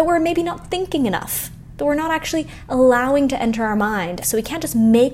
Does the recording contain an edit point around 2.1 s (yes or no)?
no